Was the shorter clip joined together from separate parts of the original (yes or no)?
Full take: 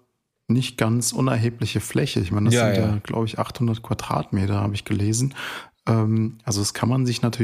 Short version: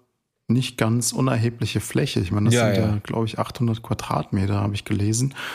no